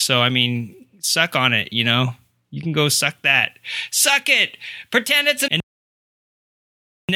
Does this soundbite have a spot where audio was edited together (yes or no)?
yes